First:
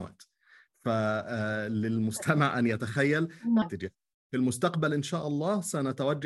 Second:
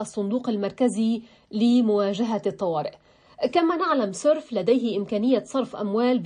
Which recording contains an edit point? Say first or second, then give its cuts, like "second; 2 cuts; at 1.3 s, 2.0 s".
first; 1 cut; at 3.6 s